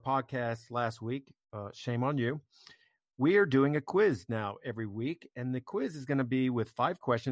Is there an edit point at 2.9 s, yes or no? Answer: no